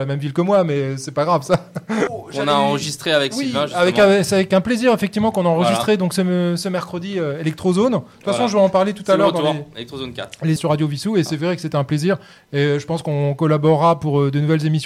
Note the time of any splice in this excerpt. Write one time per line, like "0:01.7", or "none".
0:02.1
0:10.6